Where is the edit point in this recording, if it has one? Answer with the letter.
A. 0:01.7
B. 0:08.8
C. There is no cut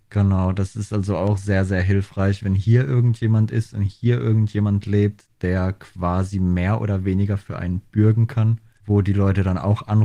B